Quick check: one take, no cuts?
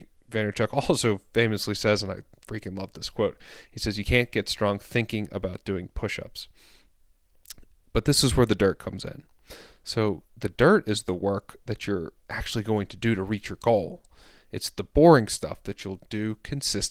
yes; 0 cuts

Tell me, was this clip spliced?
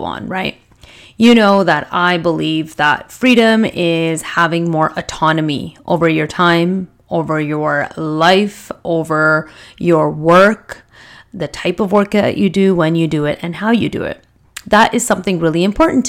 no; 0 cuts

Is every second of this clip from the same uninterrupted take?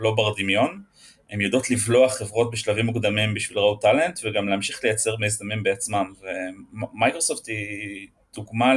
yes; 0 cuts

